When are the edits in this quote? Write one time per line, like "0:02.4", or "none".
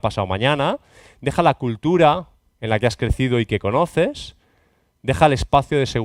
none

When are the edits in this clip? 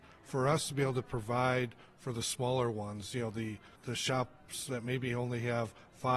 0:03.8

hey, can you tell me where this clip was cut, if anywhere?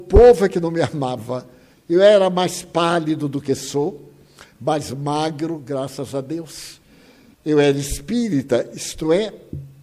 0:01.7
0:07.3

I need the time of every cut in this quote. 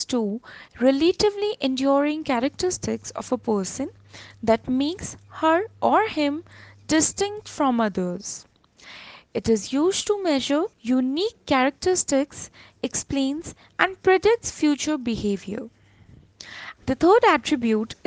0:10.7
0:16.8

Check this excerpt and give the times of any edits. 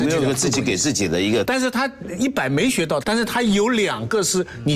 0:01.4
0:03.0

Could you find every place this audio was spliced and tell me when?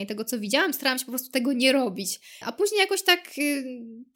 0:02.4

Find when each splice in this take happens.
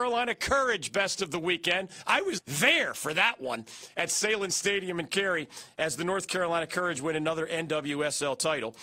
0:02.4

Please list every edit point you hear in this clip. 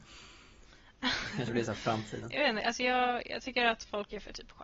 none

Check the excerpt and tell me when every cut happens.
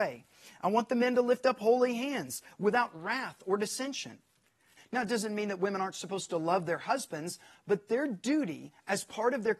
0:04.8

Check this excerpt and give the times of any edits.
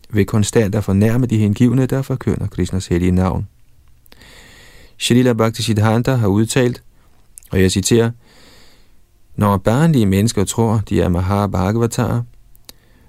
0:04.9

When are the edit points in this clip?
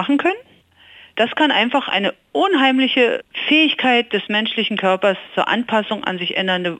none

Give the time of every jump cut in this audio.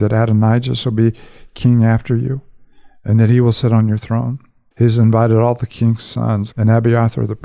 0:04.7
0:06.5

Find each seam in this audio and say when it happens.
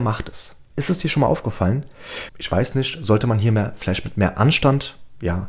0:02.3

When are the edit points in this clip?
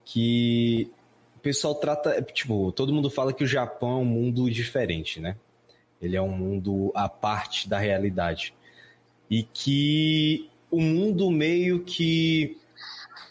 none

